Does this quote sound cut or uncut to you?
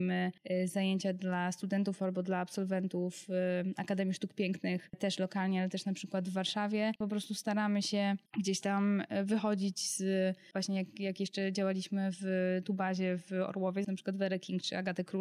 cut